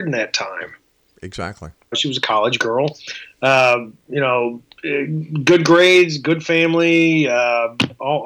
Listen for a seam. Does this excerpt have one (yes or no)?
yes